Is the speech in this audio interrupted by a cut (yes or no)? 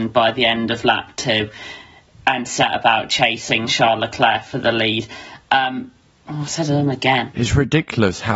no